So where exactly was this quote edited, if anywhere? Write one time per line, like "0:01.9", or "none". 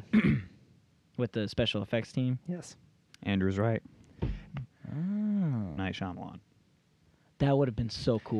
0:03.1
0:04.6
0:05.8